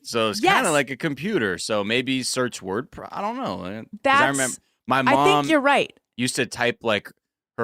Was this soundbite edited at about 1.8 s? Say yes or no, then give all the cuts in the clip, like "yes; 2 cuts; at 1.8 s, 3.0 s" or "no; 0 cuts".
no; 0 cuts